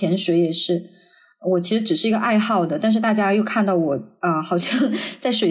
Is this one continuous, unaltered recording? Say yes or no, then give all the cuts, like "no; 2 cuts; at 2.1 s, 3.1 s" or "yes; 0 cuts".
yes; 0 cuts